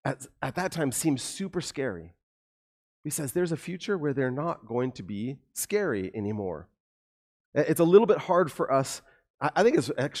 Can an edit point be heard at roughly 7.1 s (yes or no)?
no